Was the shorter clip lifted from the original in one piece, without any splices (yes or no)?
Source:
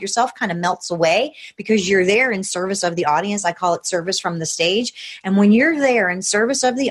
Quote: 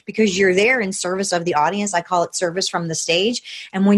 yes